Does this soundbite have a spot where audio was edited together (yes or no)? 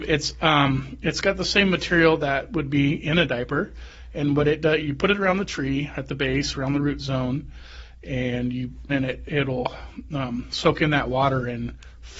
yes